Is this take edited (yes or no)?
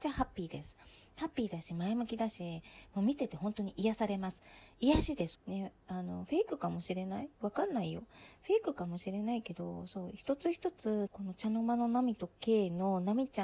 yes